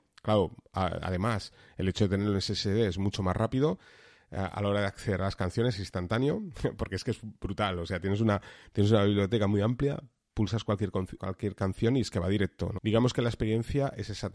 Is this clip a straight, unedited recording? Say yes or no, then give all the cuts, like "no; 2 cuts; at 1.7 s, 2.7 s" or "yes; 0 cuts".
no; 2 cuts; at 11.2 s, 12.8 s